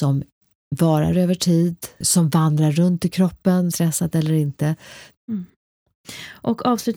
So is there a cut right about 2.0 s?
yes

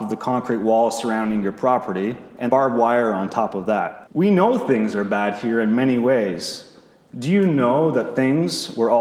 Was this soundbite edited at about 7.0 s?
no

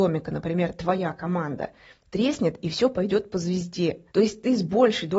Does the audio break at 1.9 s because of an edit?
no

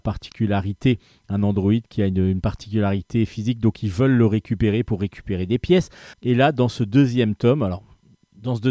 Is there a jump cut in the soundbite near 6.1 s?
yes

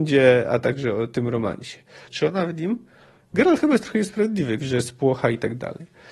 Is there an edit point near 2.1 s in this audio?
yes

